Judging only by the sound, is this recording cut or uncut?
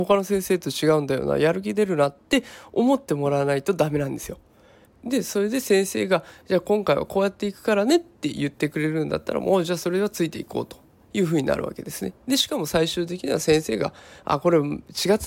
cut